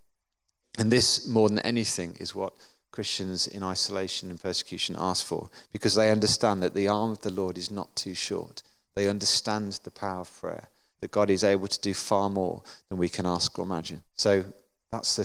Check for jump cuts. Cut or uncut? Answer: cut